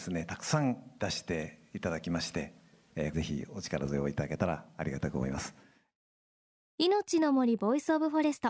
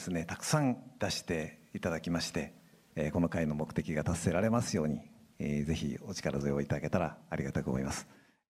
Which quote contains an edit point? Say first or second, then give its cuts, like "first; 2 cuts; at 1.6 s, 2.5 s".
first; 1 cut; at 3.1 s